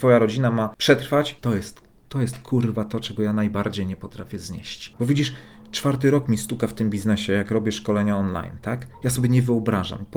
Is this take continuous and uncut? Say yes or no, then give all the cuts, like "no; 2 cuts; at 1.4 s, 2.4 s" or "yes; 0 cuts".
no; 1 cut; at 1.4 s